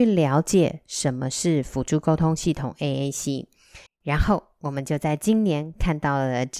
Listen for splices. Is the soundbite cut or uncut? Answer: cut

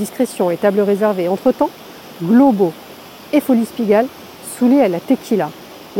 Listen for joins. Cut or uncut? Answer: cut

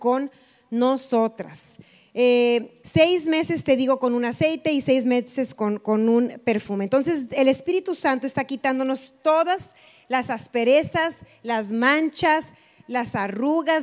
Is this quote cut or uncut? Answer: cut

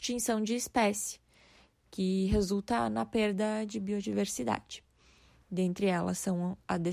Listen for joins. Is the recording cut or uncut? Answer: uncut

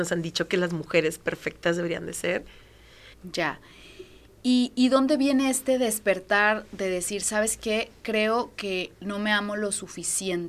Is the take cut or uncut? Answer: cut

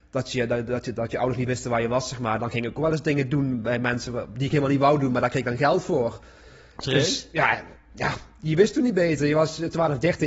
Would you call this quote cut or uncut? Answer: uncut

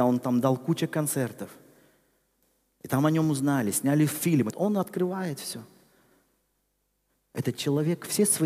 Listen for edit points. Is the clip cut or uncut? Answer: cut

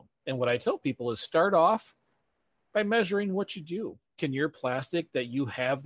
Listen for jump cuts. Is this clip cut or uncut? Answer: cut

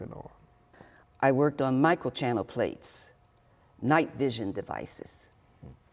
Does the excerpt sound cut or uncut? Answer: cut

